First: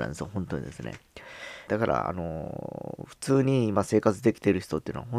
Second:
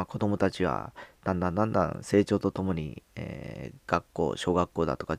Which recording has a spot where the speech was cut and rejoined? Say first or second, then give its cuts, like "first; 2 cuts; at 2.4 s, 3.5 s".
first; 1 cut; at 1.7 s